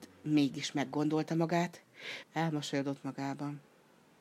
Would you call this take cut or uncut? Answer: cut